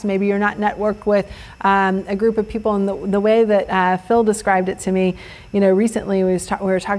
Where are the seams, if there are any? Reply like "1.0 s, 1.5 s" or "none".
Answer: none